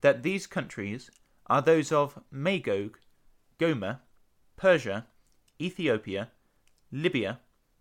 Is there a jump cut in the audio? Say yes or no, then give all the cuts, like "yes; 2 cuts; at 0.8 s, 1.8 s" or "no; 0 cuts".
no; 0 cuts